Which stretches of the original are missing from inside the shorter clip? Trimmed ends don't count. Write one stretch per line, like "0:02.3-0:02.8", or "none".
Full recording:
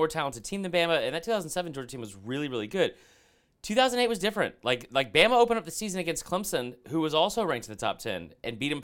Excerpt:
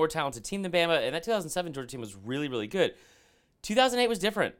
none